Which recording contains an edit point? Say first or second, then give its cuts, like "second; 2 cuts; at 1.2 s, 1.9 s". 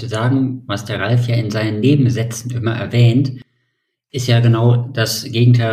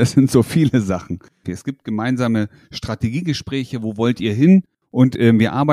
second; 1 cut; at 1.4 s